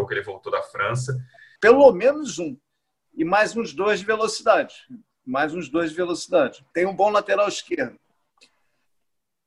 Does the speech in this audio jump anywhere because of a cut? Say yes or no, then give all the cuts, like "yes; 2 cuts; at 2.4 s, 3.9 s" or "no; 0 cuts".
yes; 2 cuts; at 1.6 s, 6.7 s